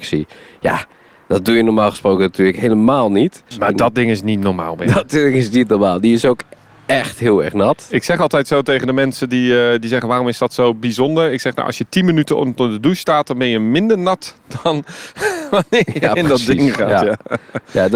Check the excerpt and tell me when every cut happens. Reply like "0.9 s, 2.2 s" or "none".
3.5 s